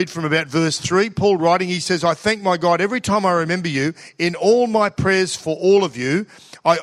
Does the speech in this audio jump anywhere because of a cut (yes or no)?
no